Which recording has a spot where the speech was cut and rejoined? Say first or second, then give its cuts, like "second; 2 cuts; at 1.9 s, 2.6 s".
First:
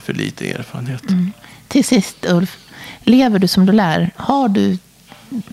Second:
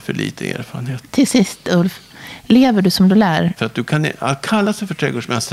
second; 2 cuts; at 1.0 s, 3.6 s